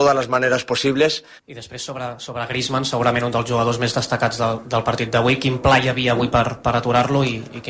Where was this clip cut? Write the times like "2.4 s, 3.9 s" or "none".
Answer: 1.4 s